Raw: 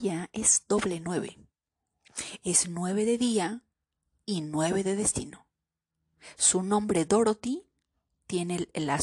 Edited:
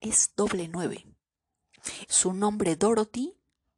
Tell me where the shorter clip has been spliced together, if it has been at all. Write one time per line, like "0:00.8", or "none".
0:02.1